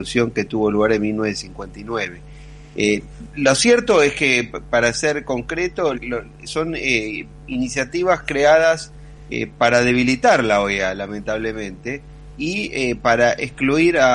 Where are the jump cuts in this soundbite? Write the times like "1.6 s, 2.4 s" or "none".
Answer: 5.9 s